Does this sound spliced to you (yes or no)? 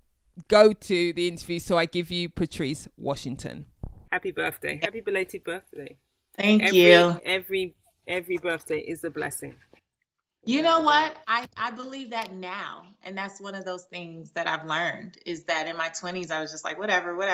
no